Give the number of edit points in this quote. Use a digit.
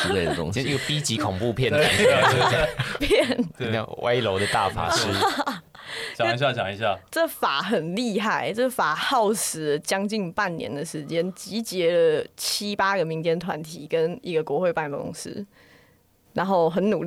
1